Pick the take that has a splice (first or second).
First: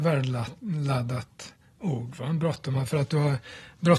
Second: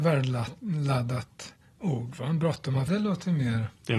second